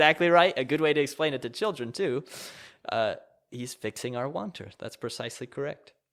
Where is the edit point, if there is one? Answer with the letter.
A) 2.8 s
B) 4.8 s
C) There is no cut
C